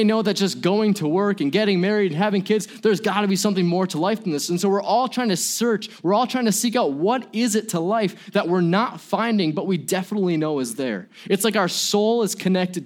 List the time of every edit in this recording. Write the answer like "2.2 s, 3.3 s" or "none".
none